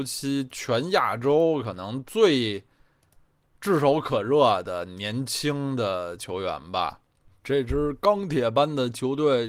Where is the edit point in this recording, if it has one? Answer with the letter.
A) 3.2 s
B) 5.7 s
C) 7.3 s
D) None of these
C